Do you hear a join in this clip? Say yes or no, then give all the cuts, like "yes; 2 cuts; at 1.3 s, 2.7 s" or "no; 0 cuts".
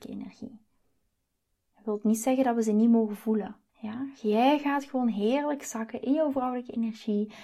yes; 2 cuts; at 1.5 s, 3.7 s